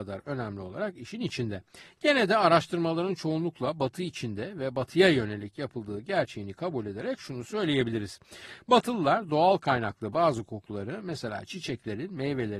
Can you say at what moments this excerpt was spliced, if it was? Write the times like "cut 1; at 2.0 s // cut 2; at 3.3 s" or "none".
none